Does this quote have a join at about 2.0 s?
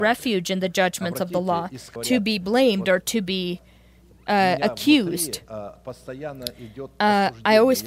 yes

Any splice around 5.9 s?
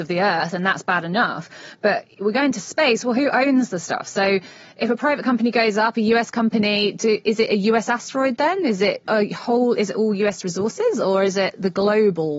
no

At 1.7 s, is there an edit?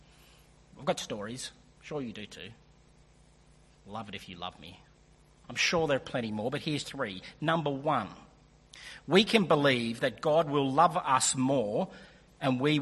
no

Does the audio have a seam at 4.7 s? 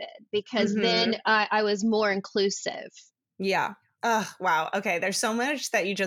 no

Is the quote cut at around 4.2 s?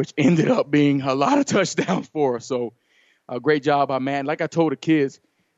no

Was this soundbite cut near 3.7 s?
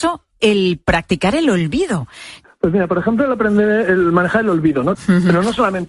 no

